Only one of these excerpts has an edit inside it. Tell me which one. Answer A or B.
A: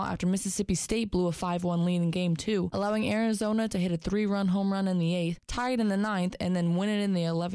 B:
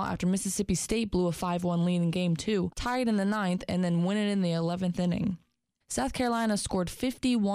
B